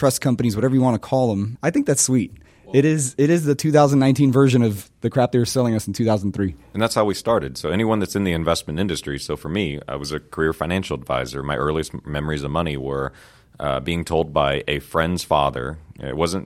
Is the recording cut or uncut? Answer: cut